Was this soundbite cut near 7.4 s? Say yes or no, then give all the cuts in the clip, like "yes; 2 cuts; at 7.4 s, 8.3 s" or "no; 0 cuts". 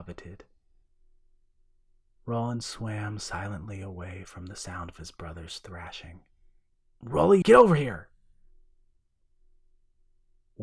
yes; 1 cut; at 7.4 s